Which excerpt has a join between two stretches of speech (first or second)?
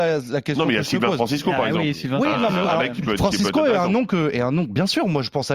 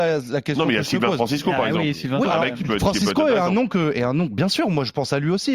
second